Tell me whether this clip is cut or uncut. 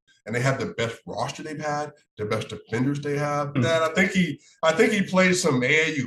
cut